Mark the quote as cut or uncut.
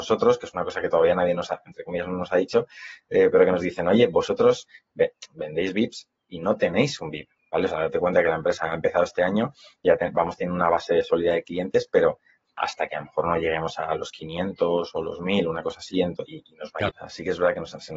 cut